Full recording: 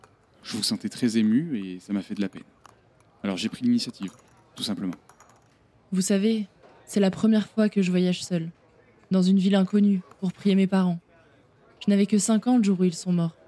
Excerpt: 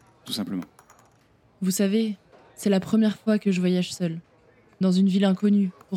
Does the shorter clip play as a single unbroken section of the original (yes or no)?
yes